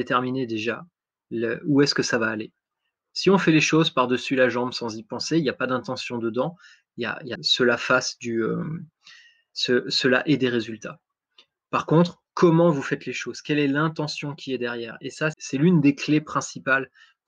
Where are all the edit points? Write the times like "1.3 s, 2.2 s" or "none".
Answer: 7.4 s, 15.3 s